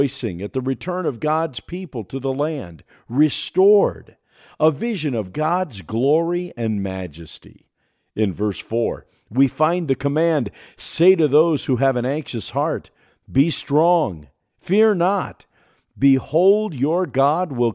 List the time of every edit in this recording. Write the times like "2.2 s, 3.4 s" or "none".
none